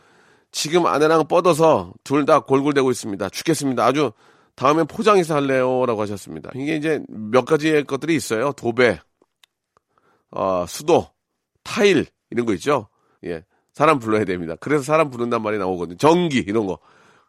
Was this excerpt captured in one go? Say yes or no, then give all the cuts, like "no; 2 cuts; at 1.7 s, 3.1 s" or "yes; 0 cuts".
no; 2 cuts; at 6.5 s, 13.2 s